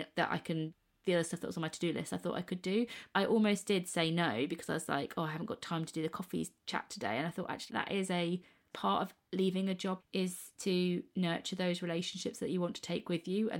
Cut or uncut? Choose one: cut